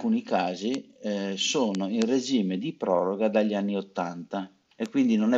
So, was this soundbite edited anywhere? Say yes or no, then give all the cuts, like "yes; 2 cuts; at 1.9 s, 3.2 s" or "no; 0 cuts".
no; 0 cuts